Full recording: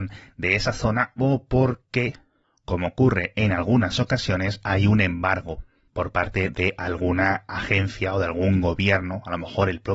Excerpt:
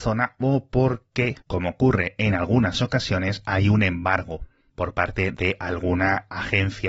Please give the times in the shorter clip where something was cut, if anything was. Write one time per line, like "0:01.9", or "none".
0:01.4